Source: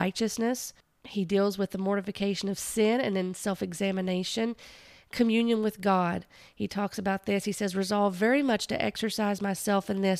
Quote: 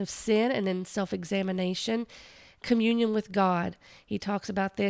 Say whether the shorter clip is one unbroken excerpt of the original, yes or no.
yes